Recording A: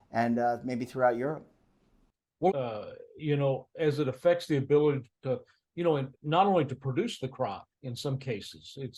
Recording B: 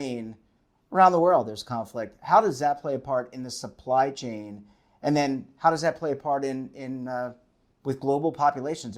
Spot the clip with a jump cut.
A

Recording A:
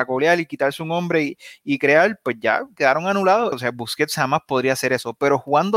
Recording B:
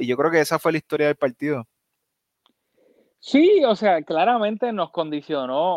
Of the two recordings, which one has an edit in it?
A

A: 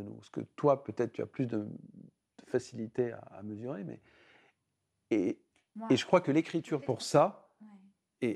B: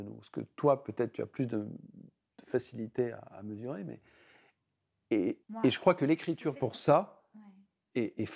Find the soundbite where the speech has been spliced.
B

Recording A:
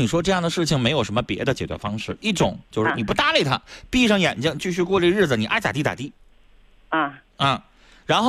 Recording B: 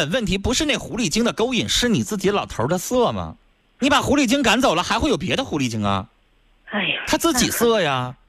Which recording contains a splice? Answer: B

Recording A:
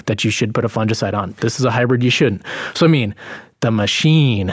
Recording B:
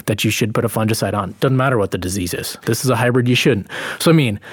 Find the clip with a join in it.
A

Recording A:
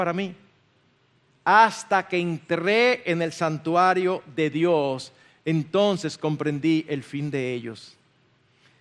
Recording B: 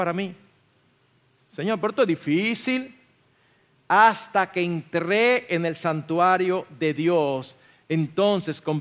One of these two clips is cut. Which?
A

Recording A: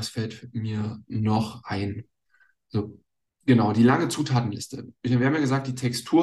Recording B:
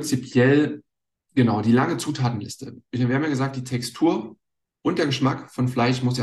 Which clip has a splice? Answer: A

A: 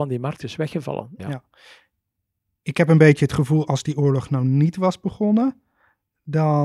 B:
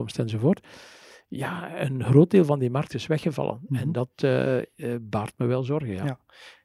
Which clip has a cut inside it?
A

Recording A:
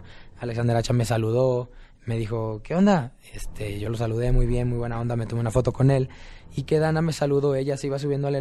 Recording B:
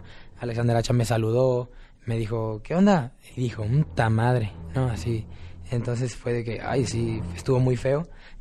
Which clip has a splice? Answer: B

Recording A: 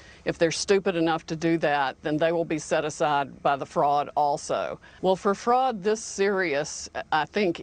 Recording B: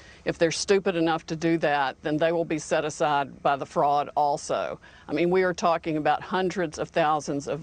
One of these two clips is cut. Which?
A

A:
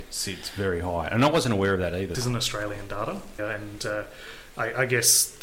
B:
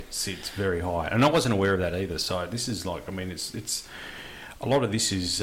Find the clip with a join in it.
A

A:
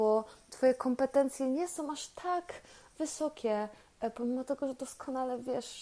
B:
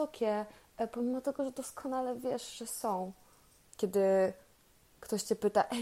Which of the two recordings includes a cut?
B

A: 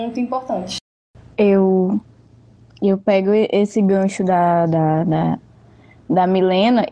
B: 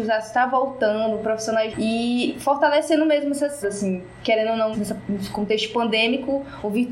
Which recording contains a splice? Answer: B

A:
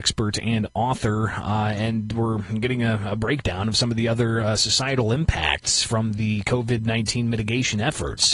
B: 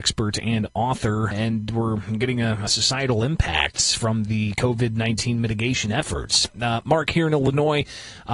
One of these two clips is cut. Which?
B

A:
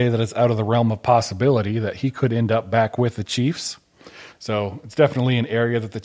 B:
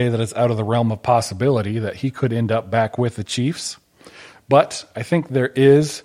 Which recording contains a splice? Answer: A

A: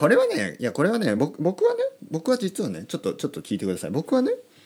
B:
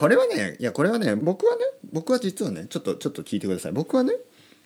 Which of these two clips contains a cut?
B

